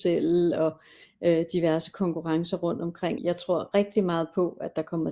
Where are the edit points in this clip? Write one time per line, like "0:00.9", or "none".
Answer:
0:03.2

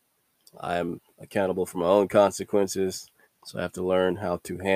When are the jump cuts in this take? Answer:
0:03.2

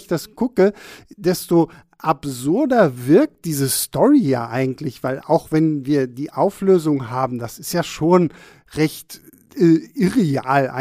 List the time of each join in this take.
none

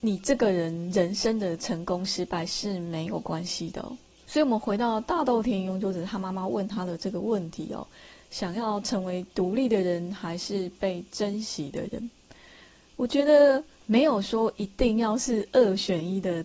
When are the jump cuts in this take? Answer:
0:04.2
0:13.8

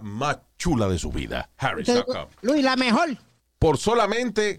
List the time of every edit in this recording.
0:03.4

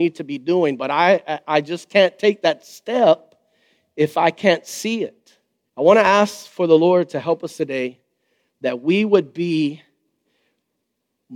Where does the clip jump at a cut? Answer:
0:05.7

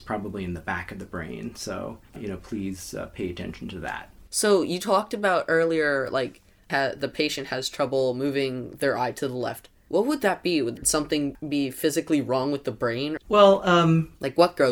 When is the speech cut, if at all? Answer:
0:02.1
0:04.2
0:13.2

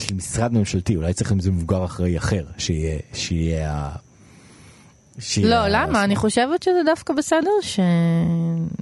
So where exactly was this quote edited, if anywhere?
none

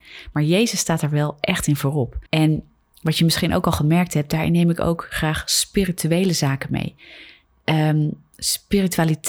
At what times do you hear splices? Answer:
0:02.3

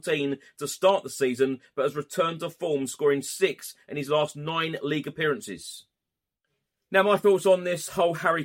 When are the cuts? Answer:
none

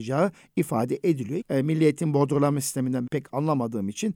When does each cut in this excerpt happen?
0:01.4
0:03.1

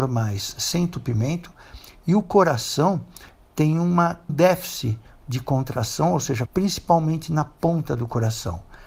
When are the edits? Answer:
0:04.3
0:06.5

